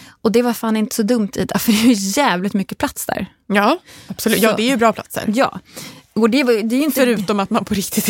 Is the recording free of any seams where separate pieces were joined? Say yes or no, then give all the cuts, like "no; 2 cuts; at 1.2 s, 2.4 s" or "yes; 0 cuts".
yes; 0 cuts